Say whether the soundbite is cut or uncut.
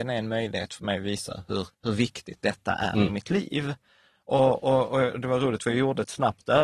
cut